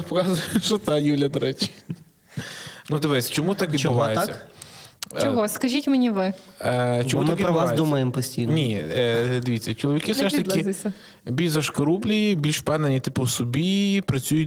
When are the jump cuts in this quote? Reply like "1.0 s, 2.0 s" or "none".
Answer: none